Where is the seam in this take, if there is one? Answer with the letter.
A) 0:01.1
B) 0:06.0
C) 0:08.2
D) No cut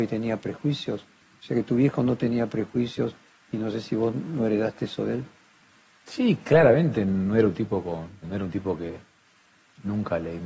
C